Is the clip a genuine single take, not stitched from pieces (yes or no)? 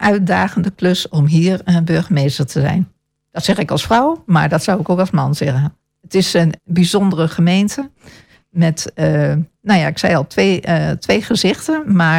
no